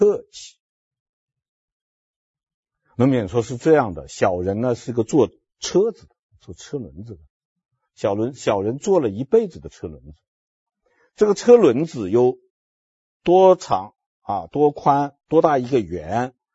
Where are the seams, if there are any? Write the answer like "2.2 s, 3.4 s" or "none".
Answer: none